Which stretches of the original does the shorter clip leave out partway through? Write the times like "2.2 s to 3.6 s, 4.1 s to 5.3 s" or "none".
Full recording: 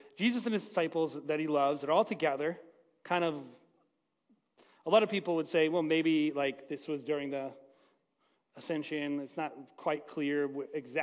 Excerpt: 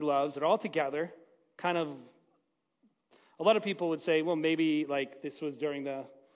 none

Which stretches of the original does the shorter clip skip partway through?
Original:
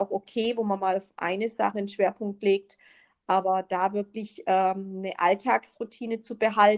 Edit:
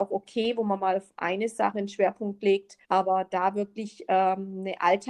2.8 s to 3.2 s

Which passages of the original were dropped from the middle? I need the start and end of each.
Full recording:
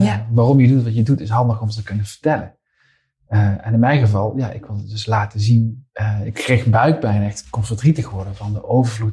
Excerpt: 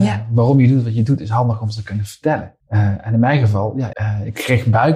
2.6 s to 3.2 s, 4.5 s to 5.9 s

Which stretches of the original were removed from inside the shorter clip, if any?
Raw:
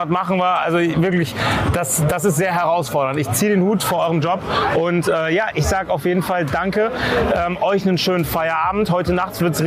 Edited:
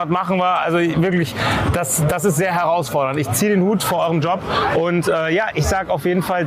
none

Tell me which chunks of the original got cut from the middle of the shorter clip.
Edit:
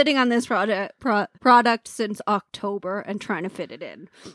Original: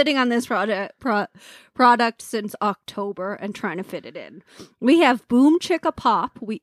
1.3 s to 1.7 s

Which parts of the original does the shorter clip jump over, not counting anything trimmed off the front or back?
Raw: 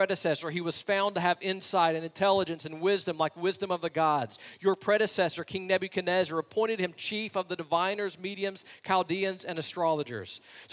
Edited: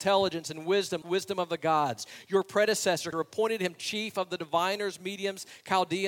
3.2 s to 3.3 s, 5.4 s to 6.3 s

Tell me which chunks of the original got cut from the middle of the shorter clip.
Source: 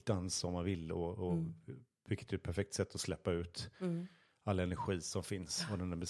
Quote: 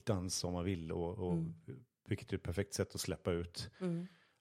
none

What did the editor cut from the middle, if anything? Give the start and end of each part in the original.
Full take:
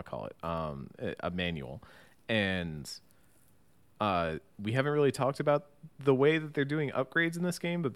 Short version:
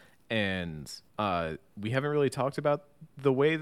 3.1 s to 3.9 s

